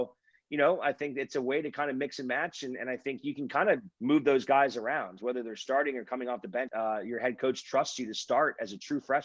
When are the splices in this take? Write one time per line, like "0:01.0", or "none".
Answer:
0:03.9
0:06.7

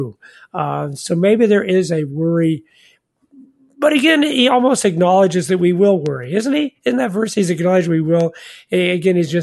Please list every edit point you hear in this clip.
none

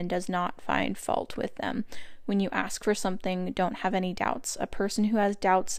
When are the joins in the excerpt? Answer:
none

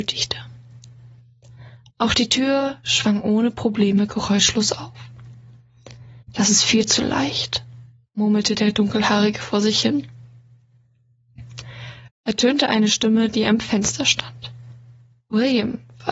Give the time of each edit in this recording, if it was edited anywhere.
0:02.8
0:06.2
0:12.1

